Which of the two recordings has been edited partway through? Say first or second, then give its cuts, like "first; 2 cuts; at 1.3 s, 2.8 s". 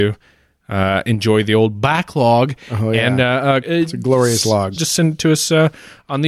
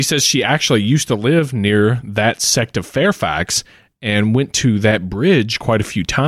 first; 2 cuts; at 3.6 s, 4.8 s